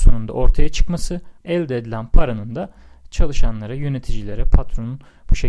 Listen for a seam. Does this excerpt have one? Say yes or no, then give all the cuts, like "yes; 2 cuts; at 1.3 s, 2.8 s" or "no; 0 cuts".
yes; 1 cut; at 1.4 s